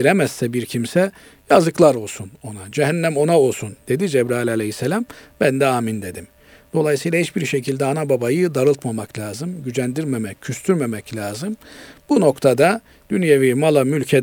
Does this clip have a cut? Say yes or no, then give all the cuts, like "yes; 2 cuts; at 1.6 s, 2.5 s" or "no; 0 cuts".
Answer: no; 0 cuts